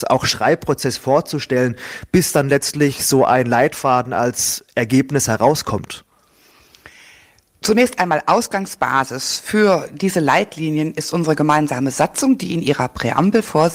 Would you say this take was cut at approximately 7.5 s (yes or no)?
no